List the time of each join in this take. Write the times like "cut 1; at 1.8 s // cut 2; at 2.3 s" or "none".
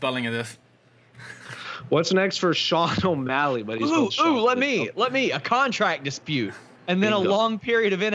cut 1; at 6.8 s